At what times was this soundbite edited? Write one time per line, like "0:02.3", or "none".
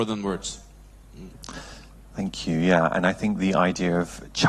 none